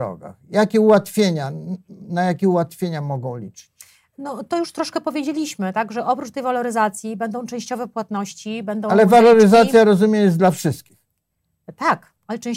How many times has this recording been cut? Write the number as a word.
zero